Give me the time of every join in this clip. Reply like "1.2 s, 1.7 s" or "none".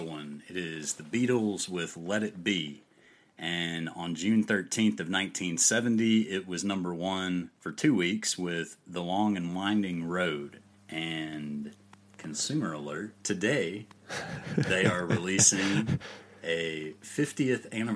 7.5 s, 10.7 s, 13.2 s